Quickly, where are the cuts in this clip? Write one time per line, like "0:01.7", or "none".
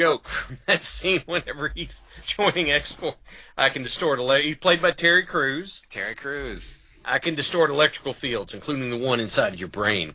none